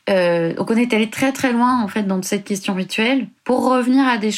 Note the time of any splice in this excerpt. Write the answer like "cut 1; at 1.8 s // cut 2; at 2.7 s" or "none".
cut 1; at 3.4 s

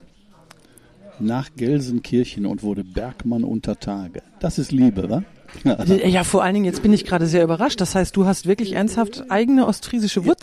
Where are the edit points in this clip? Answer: none

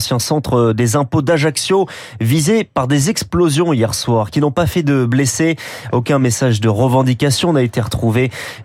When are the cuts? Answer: none

